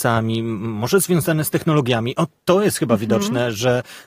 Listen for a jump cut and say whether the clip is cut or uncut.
uncut